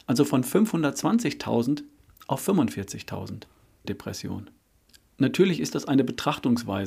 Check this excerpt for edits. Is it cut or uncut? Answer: cut